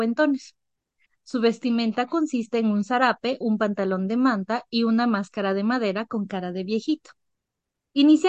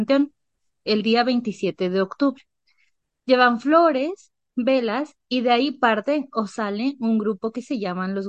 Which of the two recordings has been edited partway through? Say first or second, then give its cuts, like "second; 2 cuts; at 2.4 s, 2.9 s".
first; 2 cuts; at 1.1 s, 3.4 s